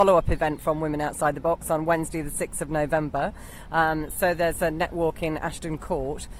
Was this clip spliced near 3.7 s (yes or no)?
no